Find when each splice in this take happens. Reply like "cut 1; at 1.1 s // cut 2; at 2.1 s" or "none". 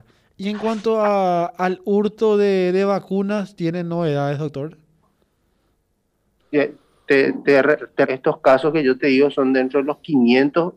cut 1; at 6.4 s // cut 2; at 8.0 s